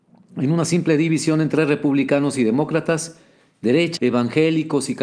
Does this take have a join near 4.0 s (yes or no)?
yes